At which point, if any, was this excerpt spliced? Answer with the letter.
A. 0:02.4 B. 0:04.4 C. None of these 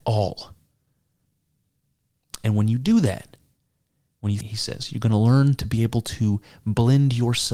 B